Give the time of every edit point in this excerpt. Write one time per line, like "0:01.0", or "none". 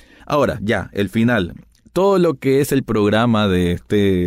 none